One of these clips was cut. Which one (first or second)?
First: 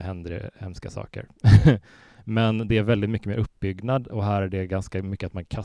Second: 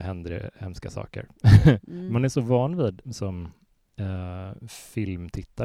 second